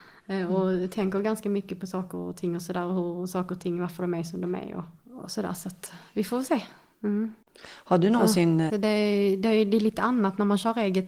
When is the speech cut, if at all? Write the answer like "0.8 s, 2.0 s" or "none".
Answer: 8.7 s

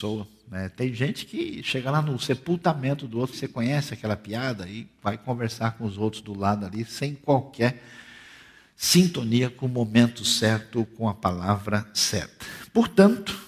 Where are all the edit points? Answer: 3.3 s

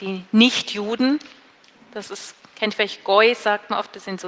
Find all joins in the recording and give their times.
none

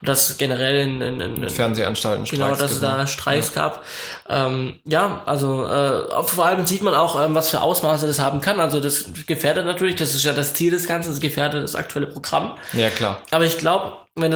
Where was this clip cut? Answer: none

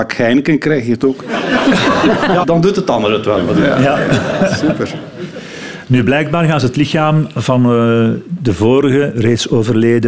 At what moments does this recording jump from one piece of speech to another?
2.4 s

